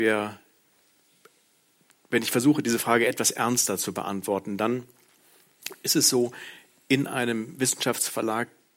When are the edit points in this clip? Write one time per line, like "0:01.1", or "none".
none